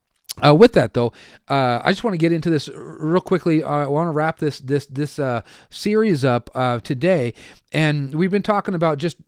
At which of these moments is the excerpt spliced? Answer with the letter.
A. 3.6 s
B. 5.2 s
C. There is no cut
C